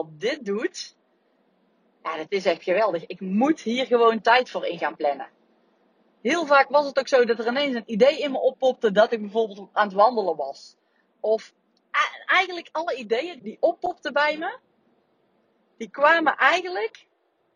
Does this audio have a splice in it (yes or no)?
yes